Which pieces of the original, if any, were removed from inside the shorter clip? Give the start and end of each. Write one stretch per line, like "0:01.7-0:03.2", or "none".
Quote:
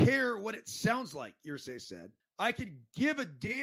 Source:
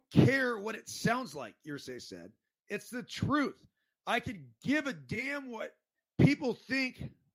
0:02.4-0:03.9